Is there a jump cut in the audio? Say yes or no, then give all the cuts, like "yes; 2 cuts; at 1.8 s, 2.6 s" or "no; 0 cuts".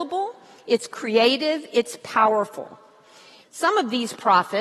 yes; 1 cut; at 3.4 s